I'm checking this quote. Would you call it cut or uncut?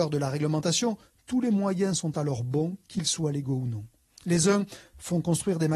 uncut